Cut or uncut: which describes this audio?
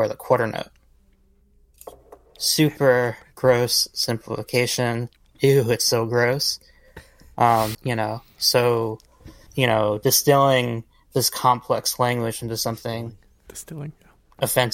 cut